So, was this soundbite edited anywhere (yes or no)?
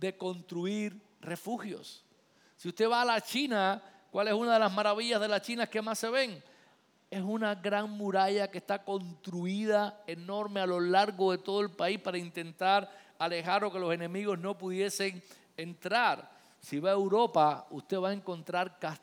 no